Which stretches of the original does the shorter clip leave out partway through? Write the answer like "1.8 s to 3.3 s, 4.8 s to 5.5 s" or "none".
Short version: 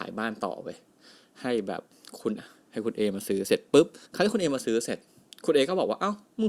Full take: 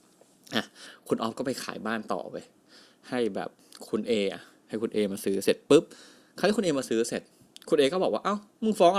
4.1 s to 4.3 s, 6.0 s to 6.3 s